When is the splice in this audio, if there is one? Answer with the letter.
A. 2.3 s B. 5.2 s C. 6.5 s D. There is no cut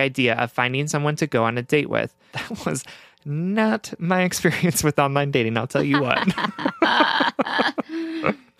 A